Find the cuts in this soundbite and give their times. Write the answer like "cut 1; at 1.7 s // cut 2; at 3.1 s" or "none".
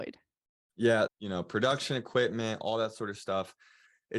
cut 1; at 1.1 s